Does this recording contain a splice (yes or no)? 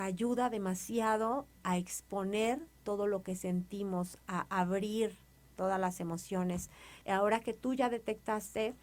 yes